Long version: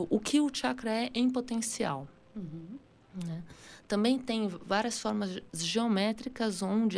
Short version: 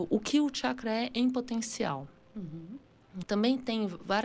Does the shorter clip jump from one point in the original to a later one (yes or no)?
yes